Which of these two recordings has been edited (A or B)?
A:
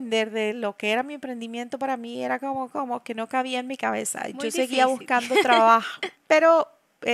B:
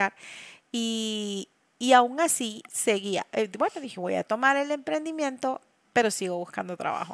A